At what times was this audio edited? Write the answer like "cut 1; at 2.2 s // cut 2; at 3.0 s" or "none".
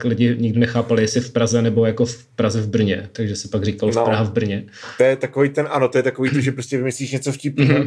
none